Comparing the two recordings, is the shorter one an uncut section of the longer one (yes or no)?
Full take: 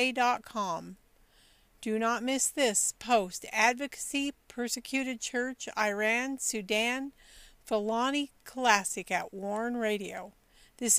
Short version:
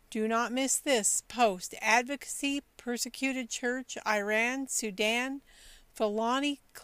yes